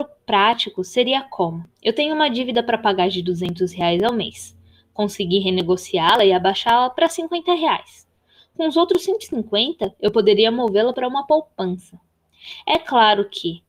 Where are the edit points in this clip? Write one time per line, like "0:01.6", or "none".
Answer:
none